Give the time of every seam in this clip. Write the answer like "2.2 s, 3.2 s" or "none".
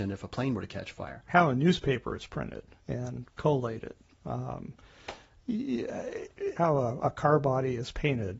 1.3 s, 6.6 s